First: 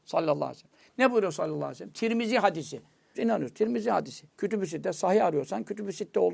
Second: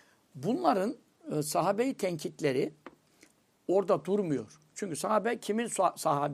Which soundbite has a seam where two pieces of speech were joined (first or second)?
first